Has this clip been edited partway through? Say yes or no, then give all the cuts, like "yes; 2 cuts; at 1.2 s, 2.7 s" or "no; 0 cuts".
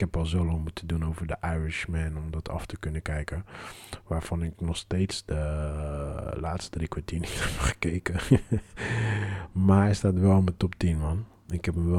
no; 0 cuts